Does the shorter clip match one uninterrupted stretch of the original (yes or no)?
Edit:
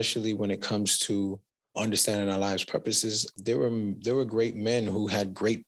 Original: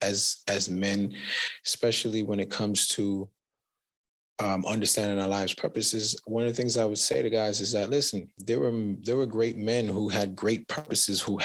no